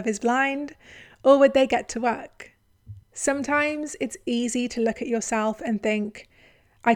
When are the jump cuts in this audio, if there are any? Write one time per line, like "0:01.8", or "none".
0:03.0